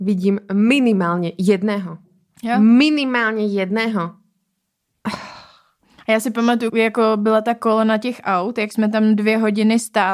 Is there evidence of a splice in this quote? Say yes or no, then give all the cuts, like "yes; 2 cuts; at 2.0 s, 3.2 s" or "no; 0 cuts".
yes; 1 cut; at 6.7 s